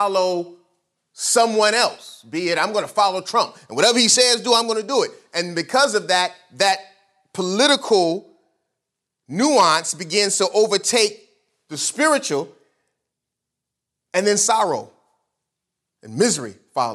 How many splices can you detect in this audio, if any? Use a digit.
0